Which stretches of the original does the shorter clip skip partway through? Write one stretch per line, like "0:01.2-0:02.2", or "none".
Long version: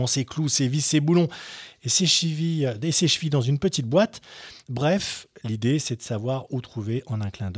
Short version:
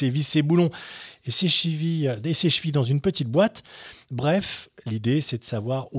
none